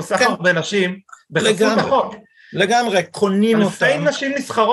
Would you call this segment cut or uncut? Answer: uncut